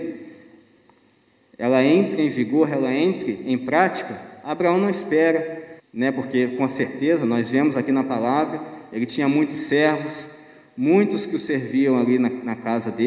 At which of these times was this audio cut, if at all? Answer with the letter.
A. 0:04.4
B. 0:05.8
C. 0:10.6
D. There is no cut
B